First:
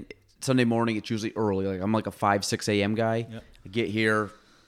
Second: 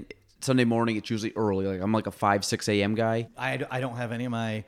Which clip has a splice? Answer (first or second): second